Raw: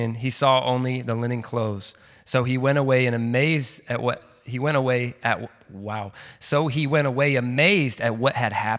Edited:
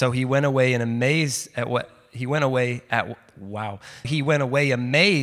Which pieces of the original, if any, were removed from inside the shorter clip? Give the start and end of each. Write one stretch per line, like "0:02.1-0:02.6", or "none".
0:06.4-0:06.7